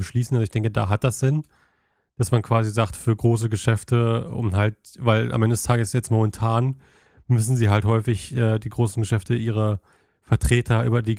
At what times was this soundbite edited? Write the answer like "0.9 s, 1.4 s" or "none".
none